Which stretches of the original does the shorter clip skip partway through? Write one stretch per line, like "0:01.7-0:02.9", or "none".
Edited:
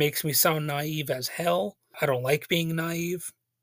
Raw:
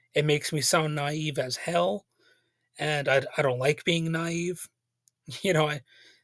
0:02.2-0:03.3